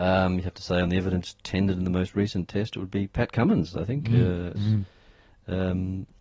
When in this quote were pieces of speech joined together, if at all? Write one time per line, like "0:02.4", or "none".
0:04.6